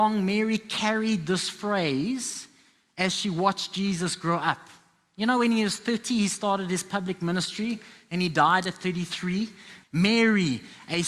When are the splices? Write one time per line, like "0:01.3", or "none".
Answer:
0:09.8